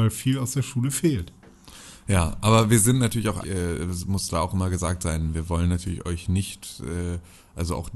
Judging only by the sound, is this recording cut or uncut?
cut